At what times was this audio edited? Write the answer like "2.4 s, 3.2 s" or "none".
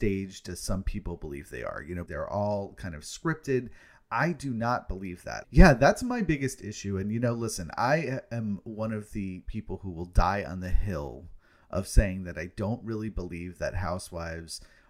2.1 s, 5.4 s